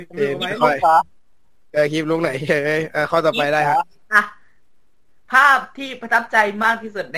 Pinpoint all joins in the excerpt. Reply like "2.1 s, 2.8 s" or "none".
none

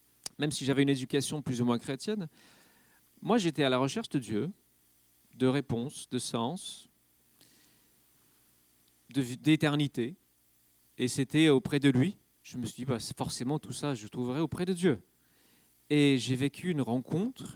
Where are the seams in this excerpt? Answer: none

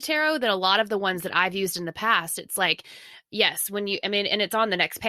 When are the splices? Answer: none

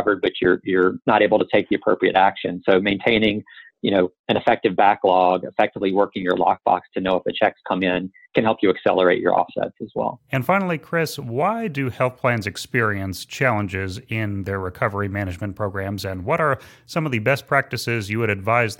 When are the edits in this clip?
none

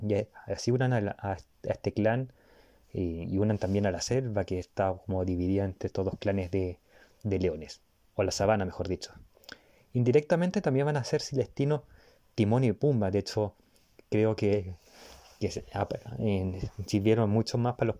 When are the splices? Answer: none

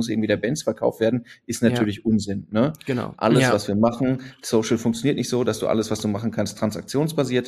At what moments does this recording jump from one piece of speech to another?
3.1 s

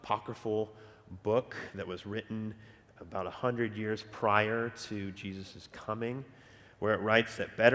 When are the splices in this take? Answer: 3.0 s

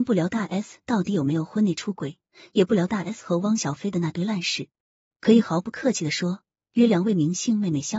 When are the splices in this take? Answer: 5.1 s

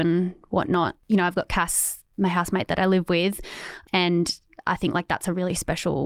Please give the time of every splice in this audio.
none

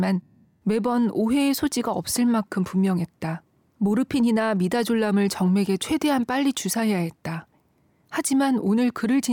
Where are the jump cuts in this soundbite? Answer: 3.6 s

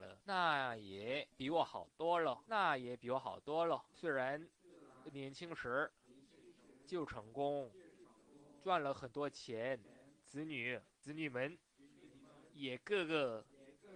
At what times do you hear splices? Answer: none

